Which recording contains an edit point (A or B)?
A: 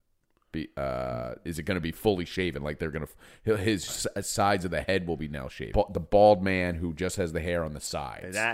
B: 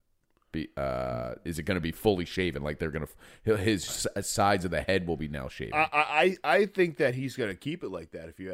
A